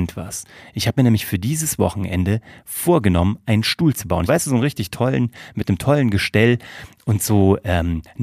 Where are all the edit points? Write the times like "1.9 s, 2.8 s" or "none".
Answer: 4.3 s